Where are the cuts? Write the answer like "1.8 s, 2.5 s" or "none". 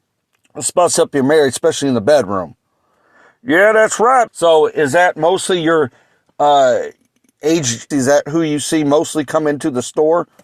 4.3 s, 7.9 s